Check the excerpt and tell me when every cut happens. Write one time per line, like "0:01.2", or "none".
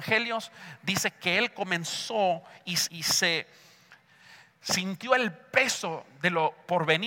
0:02.9